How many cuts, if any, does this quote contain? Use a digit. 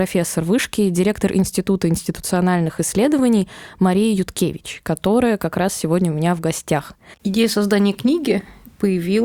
1